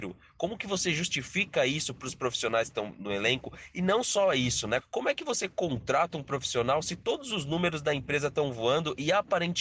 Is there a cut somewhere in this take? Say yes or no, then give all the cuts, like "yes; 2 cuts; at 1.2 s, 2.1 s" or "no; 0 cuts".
yes; 1 cut; at 4.8 s